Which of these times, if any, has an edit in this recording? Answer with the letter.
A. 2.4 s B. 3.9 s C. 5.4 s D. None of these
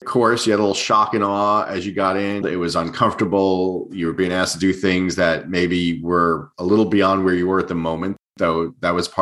A